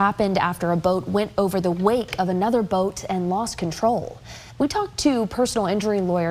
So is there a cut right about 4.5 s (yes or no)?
yes